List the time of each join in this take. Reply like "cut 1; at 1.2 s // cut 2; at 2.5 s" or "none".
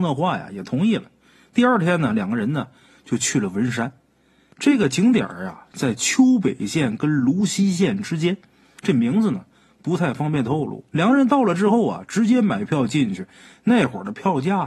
cut 1; at 10.9 s